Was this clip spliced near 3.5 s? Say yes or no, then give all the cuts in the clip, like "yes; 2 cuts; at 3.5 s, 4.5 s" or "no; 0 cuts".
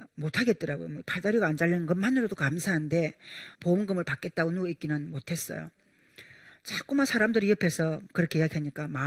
yes; 1 cut; at 3.5 s